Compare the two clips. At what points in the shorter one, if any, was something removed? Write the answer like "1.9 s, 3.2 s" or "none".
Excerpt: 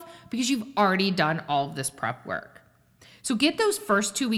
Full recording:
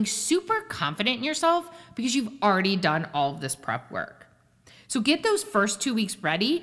none